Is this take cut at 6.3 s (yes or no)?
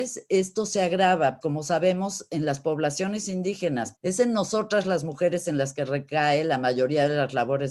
no